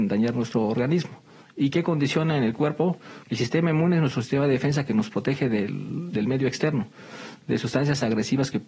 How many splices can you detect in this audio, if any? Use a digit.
2